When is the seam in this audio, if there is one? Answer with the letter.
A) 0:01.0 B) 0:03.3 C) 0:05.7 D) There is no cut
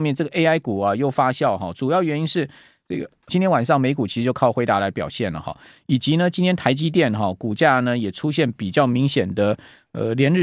B